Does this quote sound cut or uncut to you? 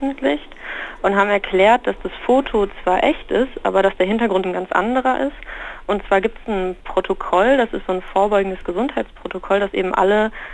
cut